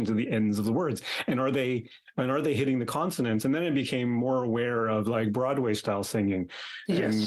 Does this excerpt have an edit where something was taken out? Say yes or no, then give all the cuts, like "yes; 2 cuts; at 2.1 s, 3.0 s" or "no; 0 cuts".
no; 0 cuts